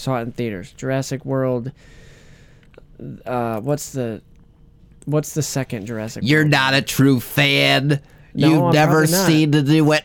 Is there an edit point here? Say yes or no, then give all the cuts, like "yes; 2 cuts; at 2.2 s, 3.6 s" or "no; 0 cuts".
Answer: no; 0 cuts